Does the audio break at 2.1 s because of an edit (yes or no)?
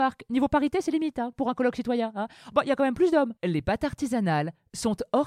no